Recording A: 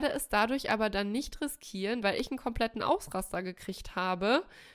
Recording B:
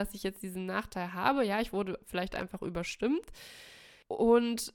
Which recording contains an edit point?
A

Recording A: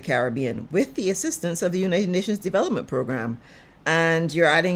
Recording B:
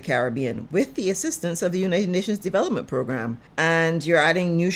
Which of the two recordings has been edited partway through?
B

